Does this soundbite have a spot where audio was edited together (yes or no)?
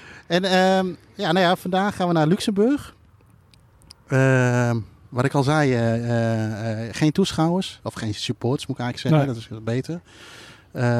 no